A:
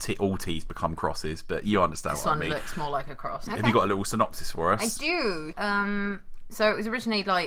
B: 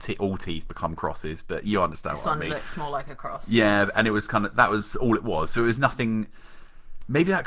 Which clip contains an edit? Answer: A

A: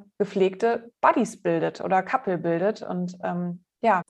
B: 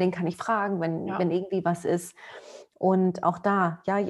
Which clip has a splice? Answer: B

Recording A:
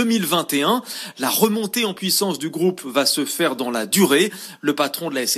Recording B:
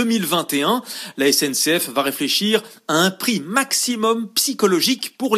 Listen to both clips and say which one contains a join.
B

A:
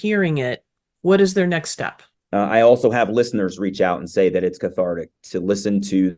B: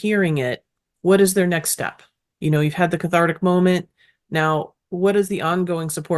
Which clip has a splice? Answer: A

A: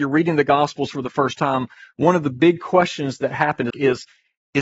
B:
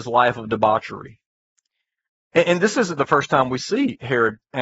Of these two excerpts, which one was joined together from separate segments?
A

